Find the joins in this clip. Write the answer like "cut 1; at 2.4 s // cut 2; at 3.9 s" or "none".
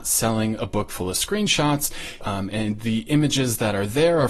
cut 1; at 2.2 s

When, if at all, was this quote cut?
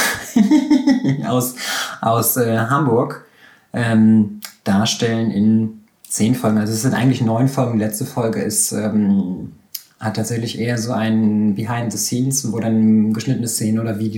none

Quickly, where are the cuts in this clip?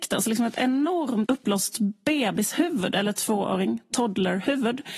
cut 1; at 1.3 s

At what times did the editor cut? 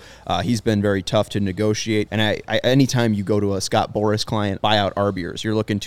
cut 1; at 2.1 s // cut 2; at 4.6 s

